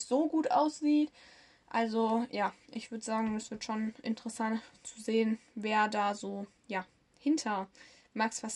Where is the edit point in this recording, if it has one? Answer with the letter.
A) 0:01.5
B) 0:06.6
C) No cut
C